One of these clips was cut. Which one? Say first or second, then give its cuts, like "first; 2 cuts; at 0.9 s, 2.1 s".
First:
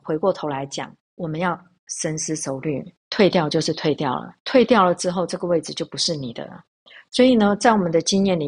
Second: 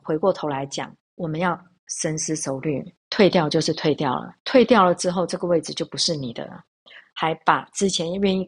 second; 1 cut; at 7.0 s